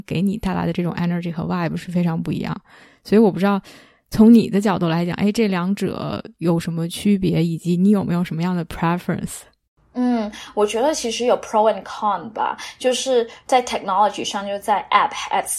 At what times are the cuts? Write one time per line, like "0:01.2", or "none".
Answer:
none